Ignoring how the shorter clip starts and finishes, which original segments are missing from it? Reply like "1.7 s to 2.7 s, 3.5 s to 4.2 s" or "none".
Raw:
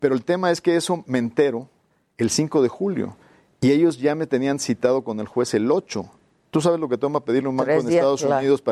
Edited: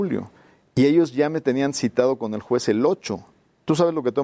none